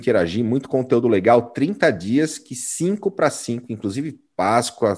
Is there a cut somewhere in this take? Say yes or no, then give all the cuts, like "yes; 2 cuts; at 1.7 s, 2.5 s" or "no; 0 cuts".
no; 0 cuts